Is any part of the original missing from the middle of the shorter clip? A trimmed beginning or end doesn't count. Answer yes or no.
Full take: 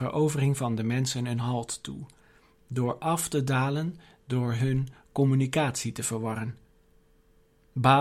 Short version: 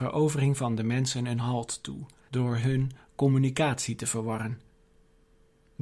yes